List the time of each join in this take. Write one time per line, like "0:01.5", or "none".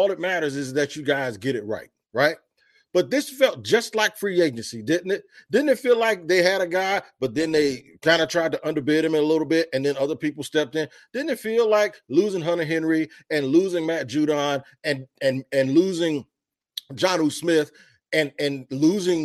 none